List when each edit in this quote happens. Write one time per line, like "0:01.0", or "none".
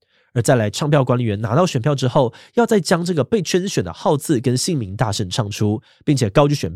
none